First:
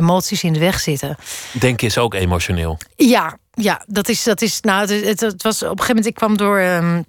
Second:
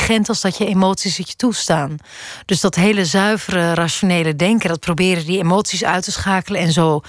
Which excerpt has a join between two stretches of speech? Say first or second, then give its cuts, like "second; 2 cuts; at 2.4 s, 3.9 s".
first; 1 cut; at 2.9 s